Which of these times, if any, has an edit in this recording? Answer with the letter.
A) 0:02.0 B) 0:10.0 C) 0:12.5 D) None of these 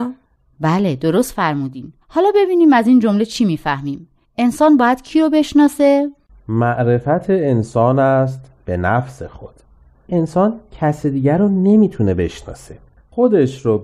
A